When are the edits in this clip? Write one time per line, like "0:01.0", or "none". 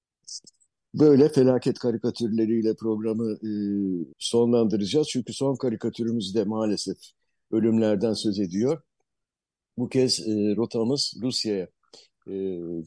0:04.1